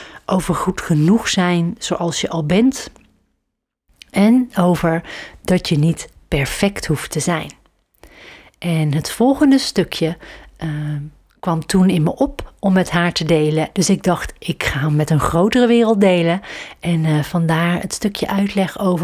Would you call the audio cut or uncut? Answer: cut